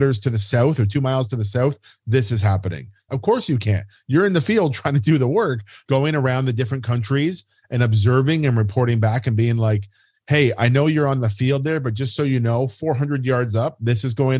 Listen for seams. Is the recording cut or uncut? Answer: cut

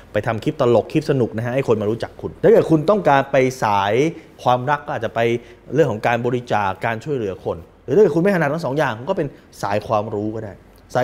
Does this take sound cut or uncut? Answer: cut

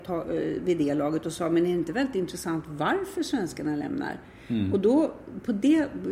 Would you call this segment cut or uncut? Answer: uncut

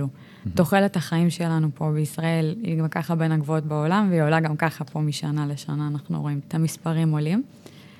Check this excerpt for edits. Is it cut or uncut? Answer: cut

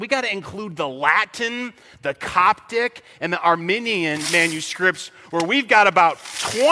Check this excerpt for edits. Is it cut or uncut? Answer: uncut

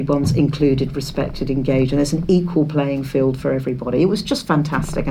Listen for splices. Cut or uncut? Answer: uncut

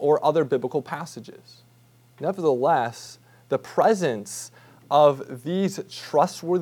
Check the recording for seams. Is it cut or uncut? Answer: cut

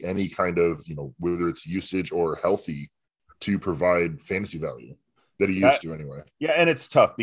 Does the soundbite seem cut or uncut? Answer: uncut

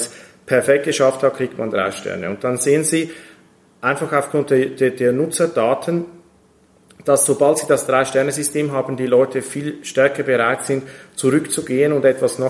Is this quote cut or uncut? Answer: uncut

